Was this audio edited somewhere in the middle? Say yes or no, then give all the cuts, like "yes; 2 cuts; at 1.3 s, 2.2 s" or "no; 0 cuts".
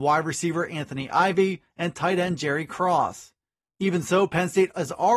no; 0 cuts